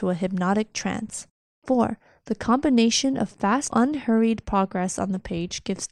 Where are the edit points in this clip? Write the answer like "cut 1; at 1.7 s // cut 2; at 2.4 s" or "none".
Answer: cut 1; at 1.6 s // cut 2; at 3.7 s